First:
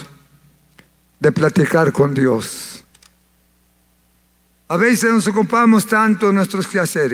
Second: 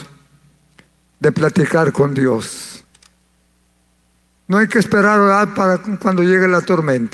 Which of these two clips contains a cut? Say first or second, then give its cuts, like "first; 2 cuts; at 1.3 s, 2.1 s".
second; 1 cut; at 4.4 s